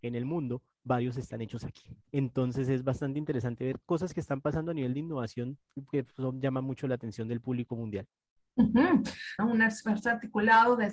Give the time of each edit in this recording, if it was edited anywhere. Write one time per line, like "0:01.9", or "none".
0:02.0
0:09.4